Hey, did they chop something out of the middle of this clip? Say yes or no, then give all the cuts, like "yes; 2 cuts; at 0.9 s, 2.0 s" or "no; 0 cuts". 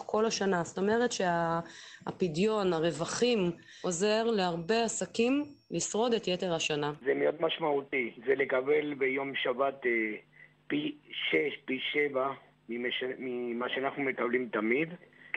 yes; 1 cut; at 7.0 s